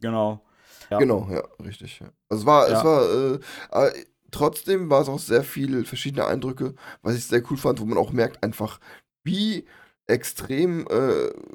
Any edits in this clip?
yes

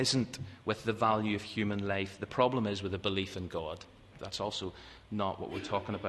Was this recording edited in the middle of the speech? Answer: yes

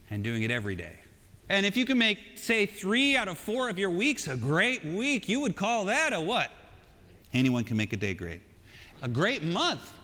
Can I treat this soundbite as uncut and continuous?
no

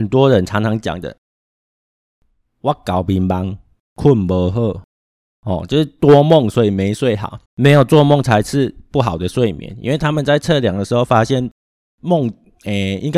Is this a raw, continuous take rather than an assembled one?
no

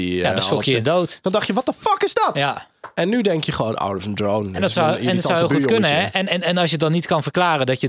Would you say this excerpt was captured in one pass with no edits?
yes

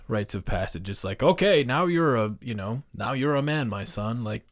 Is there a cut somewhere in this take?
no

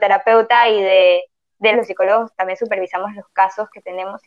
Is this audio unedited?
no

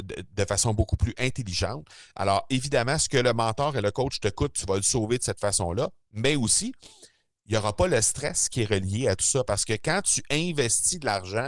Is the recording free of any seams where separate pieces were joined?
yes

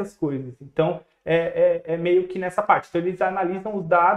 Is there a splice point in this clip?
no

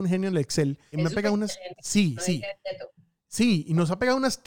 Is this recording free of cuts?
no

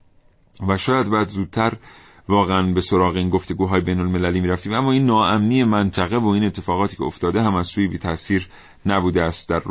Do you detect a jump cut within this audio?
no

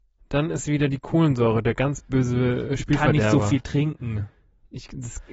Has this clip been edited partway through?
no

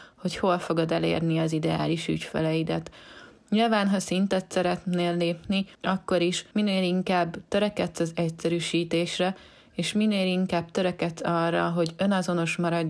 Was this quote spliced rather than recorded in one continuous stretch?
no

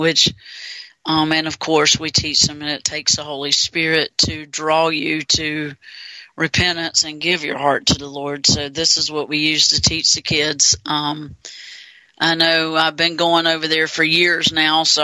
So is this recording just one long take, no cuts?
yes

